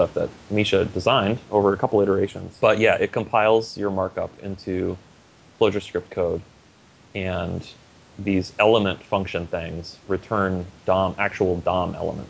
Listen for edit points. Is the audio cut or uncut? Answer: cut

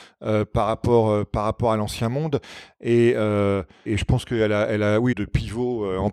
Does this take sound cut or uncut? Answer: cut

